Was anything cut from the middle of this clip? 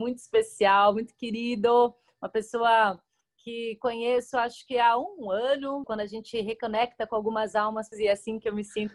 yes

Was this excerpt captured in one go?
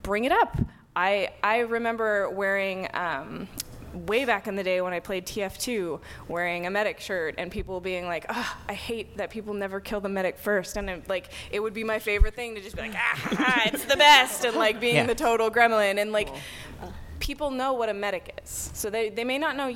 yes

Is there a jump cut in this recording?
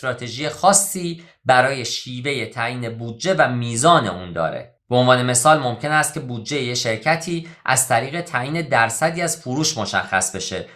yes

